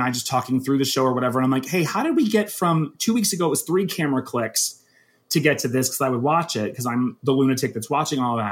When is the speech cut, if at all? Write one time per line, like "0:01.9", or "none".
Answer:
none